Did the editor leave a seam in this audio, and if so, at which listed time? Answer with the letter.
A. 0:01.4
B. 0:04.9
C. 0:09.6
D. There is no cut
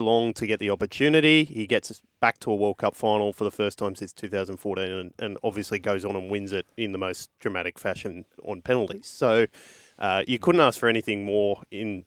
D